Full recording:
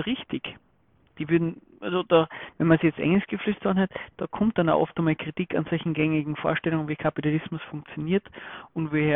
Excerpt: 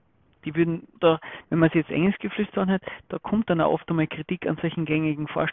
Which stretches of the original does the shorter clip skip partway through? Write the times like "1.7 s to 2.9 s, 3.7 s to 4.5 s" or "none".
1.7 s to 2.0 s